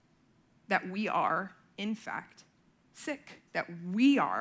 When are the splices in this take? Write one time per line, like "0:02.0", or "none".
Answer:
0:03.5